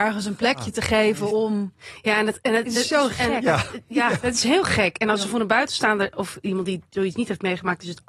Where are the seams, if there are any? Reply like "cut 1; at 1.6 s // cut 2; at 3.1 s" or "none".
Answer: none